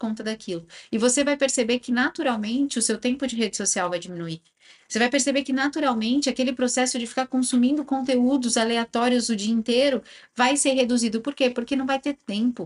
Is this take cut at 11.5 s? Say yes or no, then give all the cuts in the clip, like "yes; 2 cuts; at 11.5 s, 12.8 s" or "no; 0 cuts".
no; 0 cuts